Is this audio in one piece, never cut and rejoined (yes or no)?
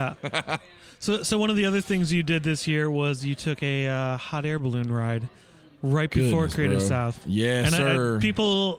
yes